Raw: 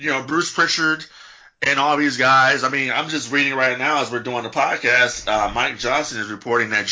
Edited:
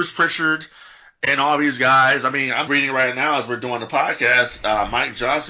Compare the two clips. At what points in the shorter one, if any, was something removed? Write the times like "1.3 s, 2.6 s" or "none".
2.7 s